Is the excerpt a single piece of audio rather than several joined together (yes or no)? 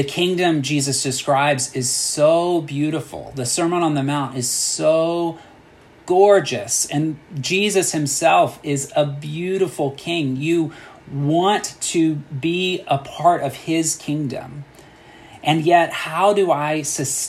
yes